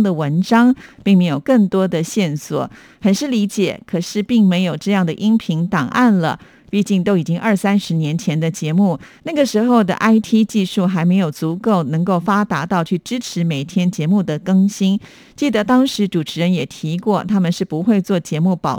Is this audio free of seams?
yes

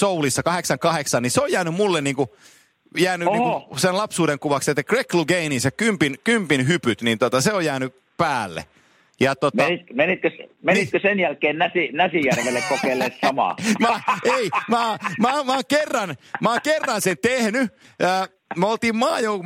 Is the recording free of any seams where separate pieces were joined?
yes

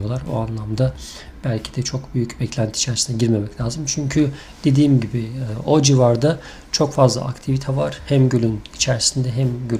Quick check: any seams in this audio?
no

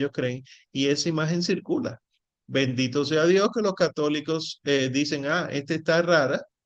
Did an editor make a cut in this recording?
no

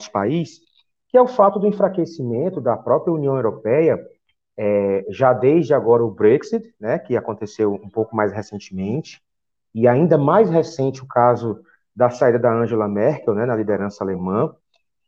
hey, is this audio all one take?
yes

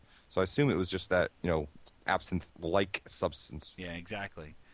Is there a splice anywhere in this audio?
no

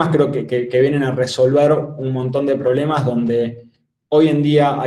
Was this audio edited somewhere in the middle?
no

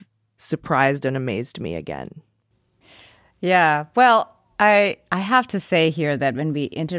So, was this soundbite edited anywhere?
no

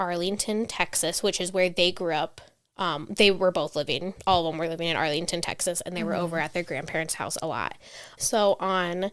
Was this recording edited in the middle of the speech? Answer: yes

